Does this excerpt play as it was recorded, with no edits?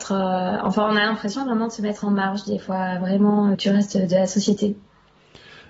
no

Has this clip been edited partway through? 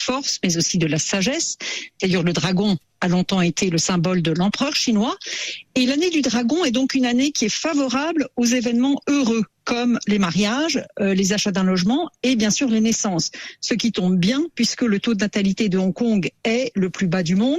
no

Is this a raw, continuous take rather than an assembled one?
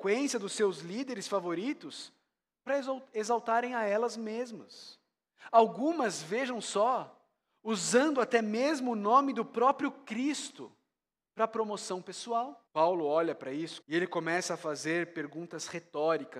no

